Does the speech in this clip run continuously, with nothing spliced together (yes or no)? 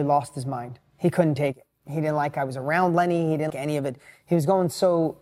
no